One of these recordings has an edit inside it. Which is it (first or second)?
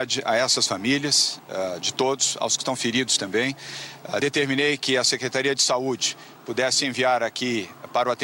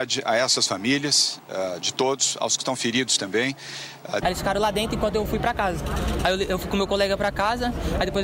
second